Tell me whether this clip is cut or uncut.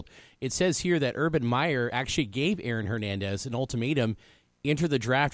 uncut